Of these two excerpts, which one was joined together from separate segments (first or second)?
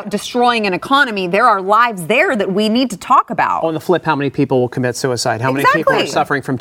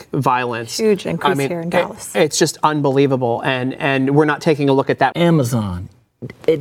second